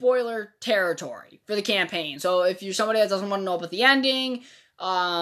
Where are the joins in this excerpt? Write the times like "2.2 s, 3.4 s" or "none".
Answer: none

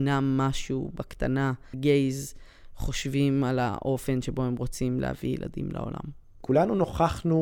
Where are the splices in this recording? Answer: 1.7 s

